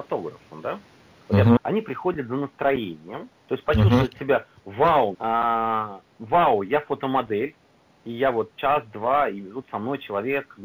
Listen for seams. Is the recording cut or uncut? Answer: cut